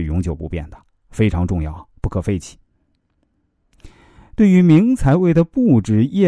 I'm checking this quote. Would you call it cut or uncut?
uncut